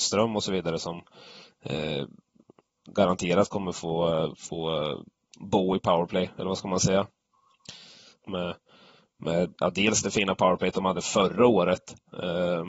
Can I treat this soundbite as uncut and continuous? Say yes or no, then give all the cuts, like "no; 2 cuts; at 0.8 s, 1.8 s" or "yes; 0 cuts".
no; 1 cut; at 8.2 s